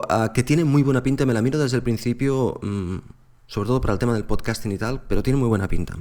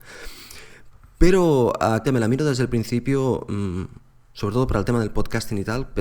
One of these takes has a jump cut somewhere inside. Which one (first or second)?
second